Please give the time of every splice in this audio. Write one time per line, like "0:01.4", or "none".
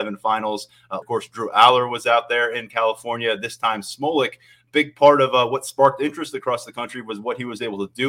0:01.0